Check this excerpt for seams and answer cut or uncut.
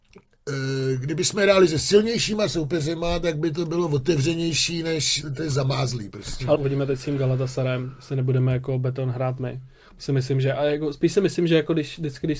cut